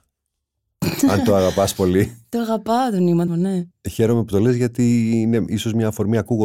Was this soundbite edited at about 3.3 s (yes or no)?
yes